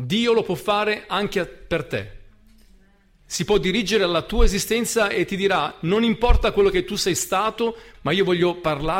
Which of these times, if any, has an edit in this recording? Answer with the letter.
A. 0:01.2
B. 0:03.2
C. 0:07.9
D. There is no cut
C